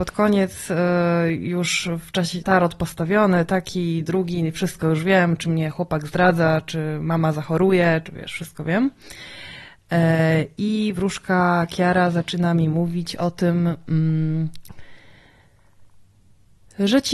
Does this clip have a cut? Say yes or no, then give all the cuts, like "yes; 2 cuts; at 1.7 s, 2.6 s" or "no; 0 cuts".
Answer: yes; 2 cuts; at 2.4 s, 8.0 s